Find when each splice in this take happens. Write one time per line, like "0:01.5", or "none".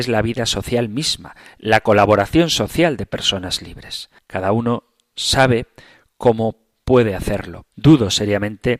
0:04.2
0:07.7